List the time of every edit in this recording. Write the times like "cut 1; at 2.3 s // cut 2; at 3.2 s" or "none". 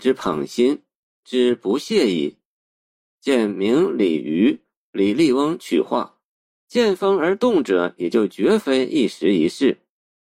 cut 1; at 6.6 s